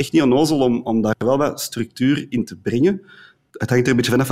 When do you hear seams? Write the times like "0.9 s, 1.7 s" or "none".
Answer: none